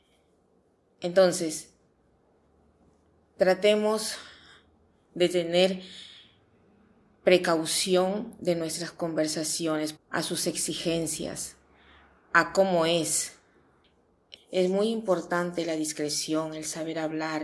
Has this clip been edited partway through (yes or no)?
yes